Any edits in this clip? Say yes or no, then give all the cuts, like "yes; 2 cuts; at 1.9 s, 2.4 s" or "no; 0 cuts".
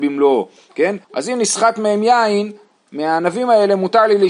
yes; 1 cut; at 1.0 s